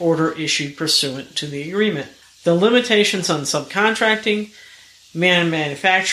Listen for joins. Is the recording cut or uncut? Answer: cut